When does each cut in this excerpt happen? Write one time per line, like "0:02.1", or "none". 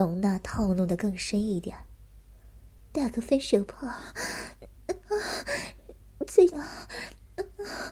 0:02.8
0:06.5

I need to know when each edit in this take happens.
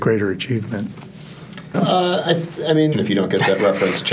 0:01.7
0:02.9

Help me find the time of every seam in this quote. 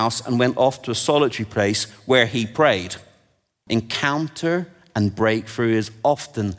0:03.7

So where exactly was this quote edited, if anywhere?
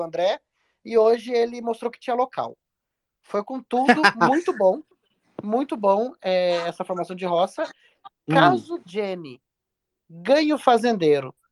0:08.1

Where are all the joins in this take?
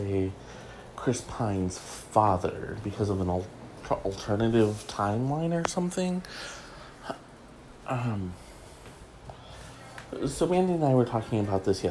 none

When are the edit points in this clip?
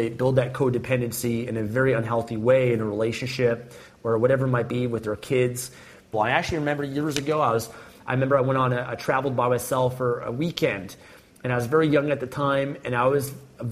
0:06.1

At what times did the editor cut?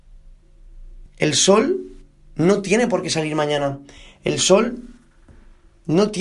0:01.1

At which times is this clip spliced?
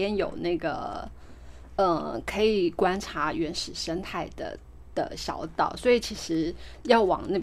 none

